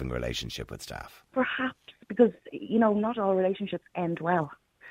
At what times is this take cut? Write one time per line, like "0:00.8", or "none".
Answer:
0:01.3